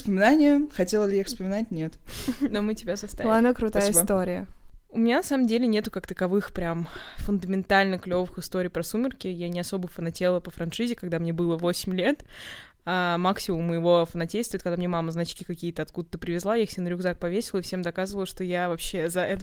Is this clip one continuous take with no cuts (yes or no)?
yes